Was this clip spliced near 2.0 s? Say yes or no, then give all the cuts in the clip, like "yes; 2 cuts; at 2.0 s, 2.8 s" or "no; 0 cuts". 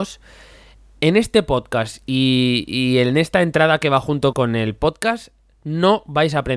no; 1 cut; at 4.3 s